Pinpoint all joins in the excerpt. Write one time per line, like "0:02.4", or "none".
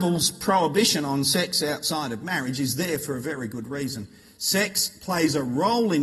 none